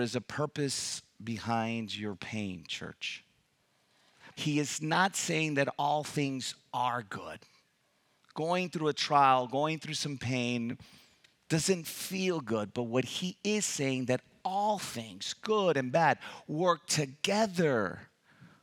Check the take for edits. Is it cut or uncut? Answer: cut